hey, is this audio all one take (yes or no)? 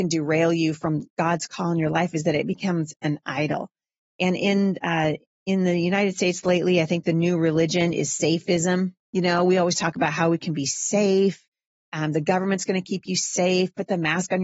yes